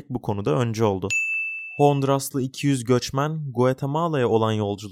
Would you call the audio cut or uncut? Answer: uncut